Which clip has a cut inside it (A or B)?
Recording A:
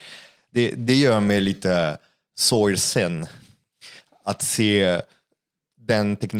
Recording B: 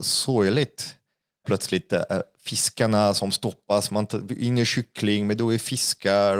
B